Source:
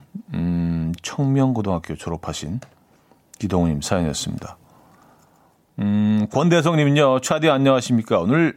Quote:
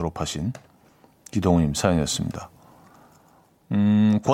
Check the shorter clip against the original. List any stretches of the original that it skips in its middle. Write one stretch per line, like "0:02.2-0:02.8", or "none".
none